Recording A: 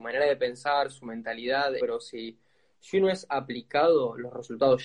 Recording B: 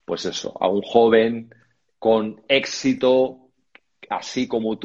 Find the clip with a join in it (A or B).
A